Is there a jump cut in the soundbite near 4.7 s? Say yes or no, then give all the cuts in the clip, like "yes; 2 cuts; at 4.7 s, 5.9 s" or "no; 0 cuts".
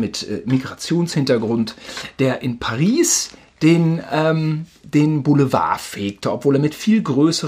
no; 0 cuts